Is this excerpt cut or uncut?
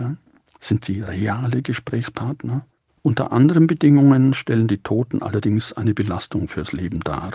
cut